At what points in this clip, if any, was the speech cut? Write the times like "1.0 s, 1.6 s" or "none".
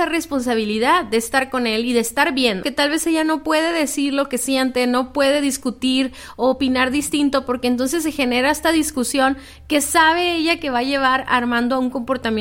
2.6 s